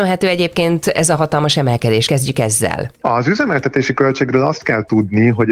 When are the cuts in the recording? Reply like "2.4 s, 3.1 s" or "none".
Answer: none